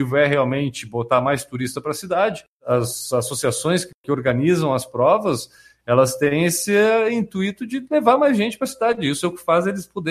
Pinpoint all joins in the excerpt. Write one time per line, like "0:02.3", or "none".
none